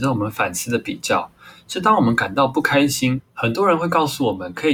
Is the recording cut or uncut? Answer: cut